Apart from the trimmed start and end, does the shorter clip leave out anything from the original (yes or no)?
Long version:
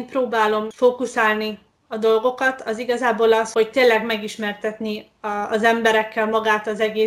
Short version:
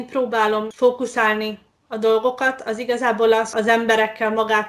yes